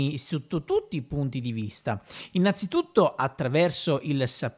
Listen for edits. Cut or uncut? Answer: uncut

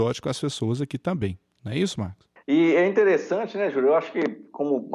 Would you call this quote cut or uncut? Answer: cut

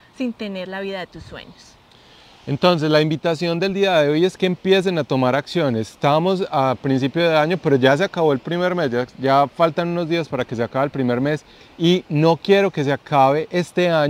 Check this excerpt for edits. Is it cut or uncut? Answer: uncut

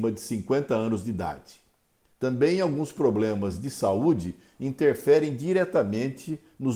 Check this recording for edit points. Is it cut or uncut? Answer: cut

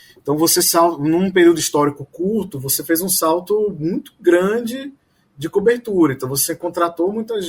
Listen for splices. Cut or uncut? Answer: uncut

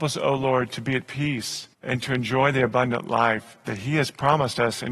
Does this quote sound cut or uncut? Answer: cut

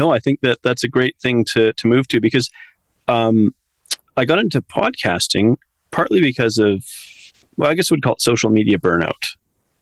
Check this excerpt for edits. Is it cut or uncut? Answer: uncut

